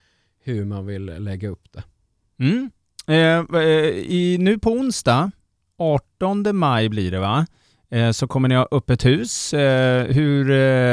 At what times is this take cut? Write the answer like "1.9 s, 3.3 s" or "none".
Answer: none